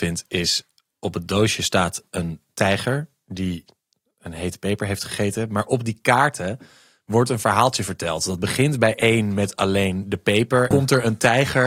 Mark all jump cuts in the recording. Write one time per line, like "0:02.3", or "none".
0:10.7